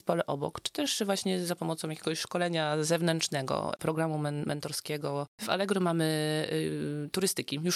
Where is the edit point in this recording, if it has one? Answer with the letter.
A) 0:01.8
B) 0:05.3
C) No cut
B